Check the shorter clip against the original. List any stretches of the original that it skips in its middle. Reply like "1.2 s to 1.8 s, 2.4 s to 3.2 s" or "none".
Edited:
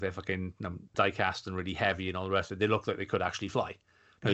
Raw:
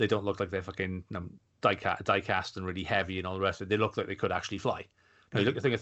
1.4 s to 2.0 s

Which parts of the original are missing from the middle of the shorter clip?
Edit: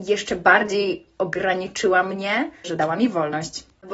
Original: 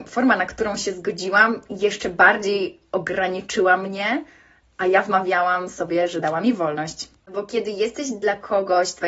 4.4 s to 6.1 s

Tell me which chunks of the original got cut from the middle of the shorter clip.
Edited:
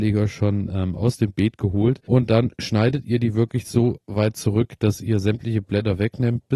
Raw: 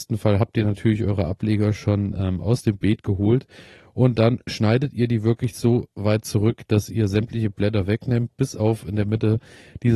3.5 s to 3.9 s

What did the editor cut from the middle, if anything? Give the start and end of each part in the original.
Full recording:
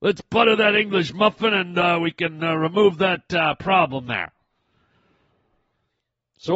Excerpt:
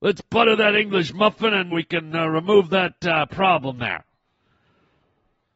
1.7 s to 2.0 s

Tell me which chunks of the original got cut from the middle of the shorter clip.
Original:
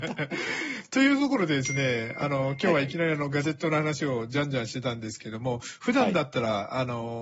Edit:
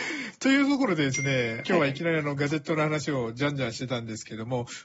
2.1 s to 2.6 s

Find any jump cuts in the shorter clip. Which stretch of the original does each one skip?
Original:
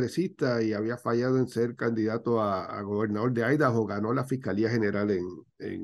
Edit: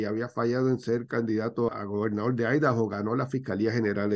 2.4 s to 2.7 s

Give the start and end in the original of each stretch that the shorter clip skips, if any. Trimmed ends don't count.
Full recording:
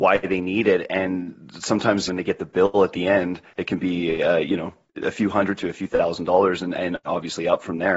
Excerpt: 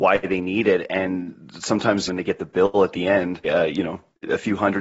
3.4 s to 4.2 s

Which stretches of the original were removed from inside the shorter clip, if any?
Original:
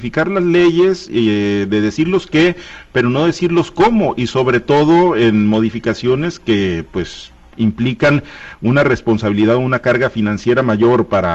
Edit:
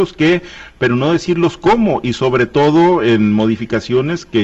none

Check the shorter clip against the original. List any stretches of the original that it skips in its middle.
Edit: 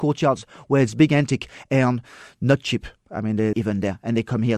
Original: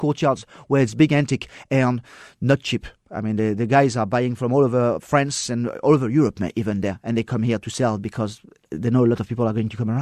3.5 s to 6.5 s

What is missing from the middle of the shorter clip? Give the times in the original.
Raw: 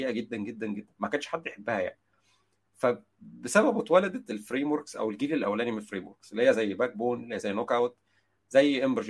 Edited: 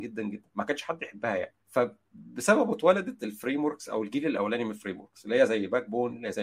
2.0 s to 2.7 s

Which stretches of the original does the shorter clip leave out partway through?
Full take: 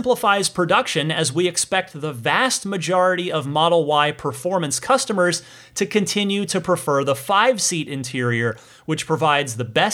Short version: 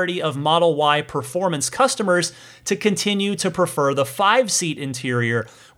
none

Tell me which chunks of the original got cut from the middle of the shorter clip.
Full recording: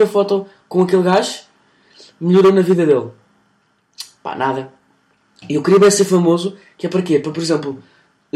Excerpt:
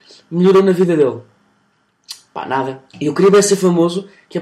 4.8 s to 5.4 s

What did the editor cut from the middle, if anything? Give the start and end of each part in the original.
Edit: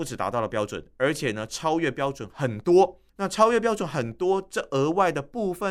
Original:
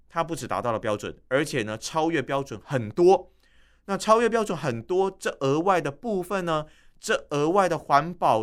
3.4 s to 3.8 s

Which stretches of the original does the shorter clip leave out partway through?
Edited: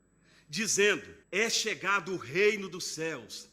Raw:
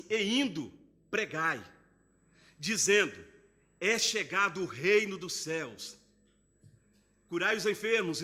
3.3 s to 3.7 s

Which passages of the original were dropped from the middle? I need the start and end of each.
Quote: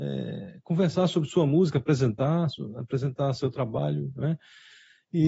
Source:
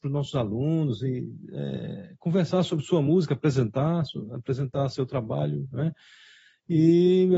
none

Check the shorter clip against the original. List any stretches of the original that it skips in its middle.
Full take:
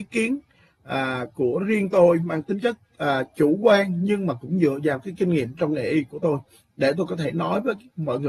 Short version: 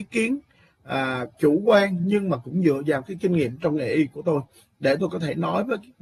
1.3 s to 3.3 s

